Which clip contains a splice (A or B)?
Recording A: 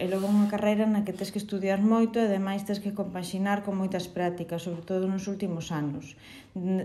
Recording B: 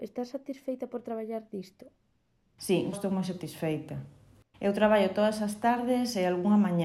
B